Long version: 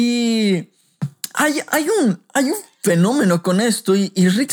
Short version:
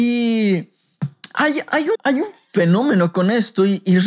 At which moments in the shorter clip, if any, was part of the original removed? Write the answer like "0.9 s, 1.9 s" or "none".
1.9 s

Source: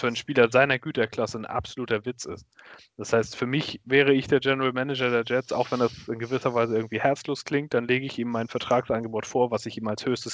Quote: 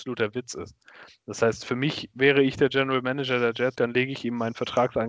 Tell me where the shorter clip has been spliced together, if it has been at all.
3.8 s

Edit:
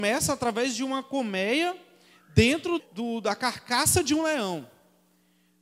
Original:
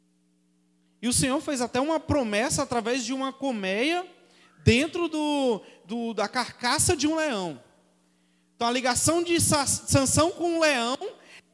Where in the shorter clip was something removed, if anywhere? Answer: 2.8 s

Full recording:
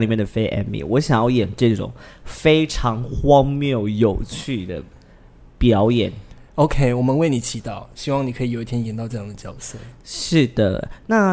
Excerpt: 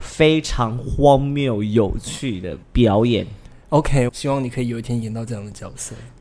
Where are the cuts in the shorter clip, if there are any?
2.6 s, 4.1 s

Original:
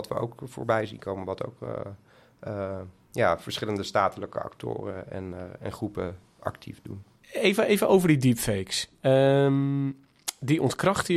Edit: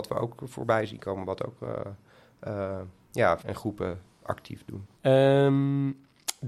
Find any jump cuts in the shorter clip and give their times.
3.4 s, 5.0 s

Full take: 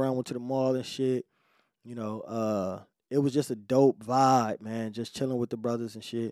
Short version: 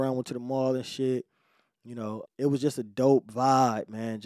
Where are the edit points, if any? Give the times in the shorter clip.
2.2 s

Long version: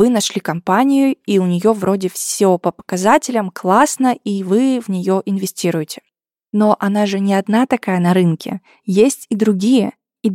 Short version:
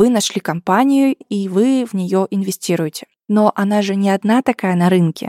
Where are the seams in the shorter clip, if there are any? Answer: 1.2 s, 3.2 s

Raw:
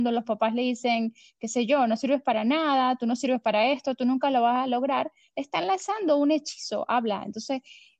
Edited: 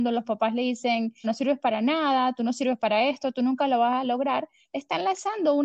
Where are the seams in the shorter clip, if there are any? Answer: 1.2 s

